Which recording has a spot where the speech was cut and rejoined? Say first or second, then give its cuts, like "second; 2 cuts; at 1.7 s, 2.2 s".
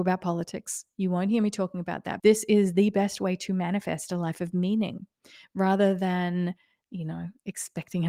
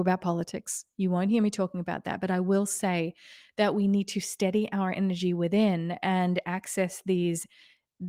first; 1 cut; at 2.2 s